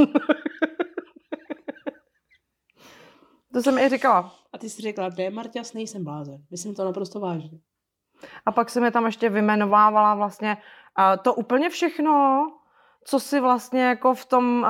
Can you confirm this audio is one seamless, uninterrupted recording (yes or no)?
yes